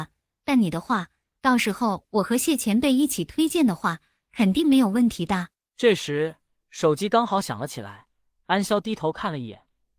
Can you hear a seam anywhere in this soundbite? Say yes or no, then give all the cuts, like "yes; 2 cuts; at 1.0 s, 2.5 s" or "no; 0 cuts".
yes; 1 cut; at 8.7 s